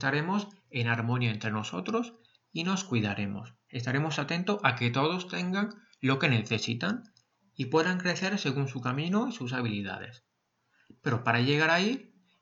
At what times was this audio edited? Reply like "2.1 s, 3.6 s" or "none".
none